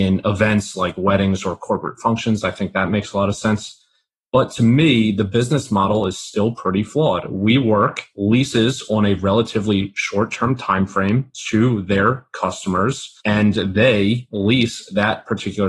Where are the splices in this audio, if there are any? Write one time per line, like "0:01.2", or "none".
none